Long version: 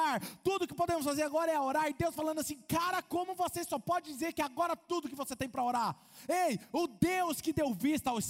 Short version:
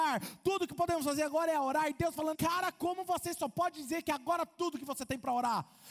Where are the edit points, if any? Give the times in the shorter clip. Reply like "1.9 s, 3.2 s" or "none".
2.3 s